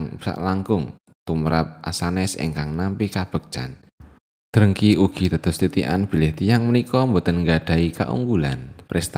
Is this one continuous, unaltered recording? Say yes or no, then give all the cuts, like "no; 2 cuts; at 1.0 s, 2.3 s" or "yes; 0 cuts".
yes; 0 cuts